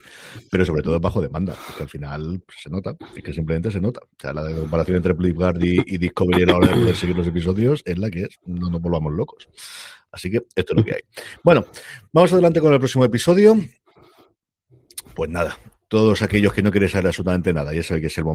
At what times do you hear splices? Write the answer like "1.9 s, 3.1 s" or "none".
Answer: 2.4 s